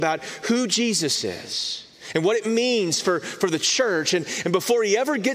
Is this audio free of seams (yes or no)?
yes